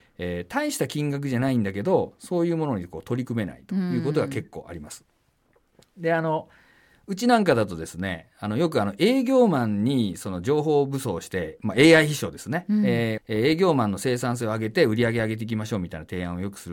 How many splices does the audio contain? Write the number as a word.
one